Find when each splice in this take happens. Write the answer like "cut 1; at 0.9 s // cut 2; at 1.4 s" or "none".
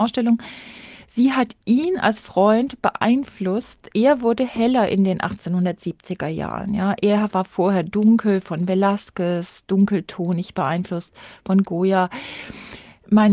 none